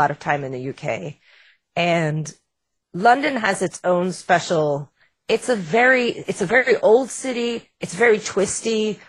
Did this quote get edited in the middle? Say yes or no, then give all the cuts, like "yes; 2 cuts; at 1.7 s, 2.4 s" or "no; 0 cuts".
no; 0 cuts